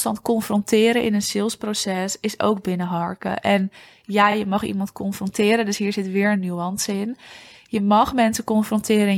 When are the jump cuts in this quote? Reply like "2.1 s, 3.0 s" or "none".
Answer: none